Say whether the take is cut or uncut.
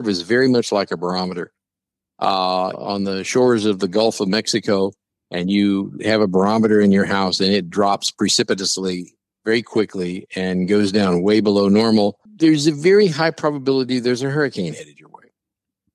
cut